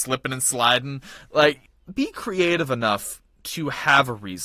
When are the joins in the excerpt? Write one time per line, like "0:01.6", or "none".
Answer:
none